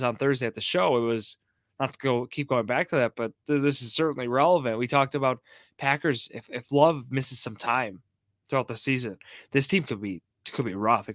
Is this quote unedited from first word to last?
yes; 0 cuts

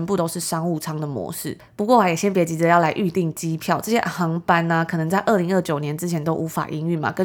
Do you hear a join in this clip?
no; 0 cuts

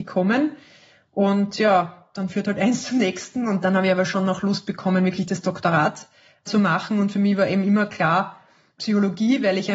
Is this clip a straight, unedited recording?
yes; 0 cuts

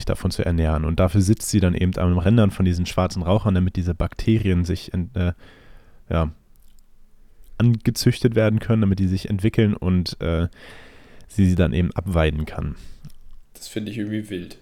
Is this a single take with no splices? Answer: yes; 0 cuts

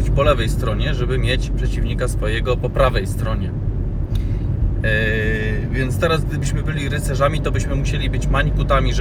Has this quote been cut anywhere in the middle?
no; 0 cuts

